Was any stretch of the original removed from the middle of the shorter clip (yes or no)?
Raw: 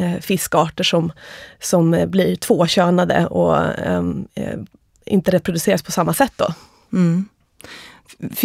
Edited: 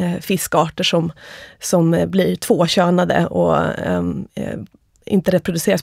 no